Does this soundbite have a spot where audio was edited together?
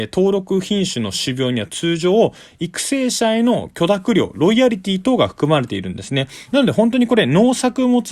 no; 0 cuts

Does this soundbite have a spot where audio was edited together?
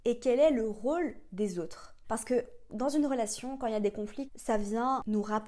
yes; 2 cuts; at 2.0 s, 4.3 s

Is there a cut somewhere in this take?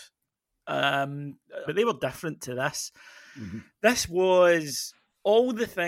yes; 1 cut; at 1.7 s

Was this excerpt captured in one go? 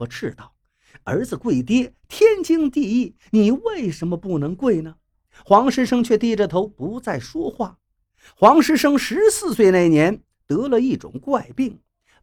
yes; 0 cuts

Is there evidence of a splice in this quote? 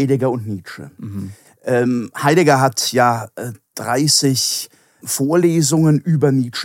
yes; 2 cuts; at 3.6 s, 5.0 s

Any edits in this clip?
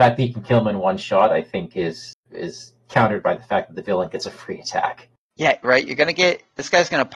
yes; 1 cut; at 5.6 s

